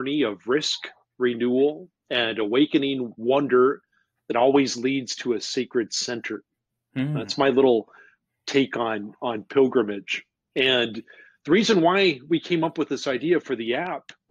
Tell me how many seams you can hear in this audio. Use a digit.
0